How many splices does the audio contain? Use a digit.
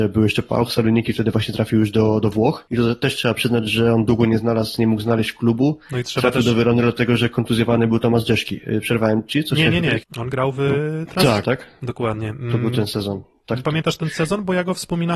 3